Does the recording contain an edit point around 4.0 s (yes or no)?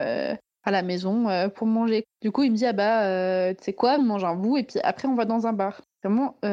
yes